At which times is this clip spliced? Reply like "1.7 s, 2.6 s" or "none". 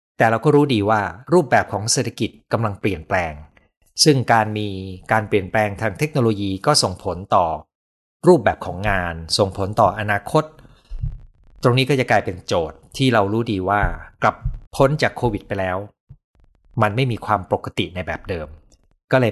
14.6 s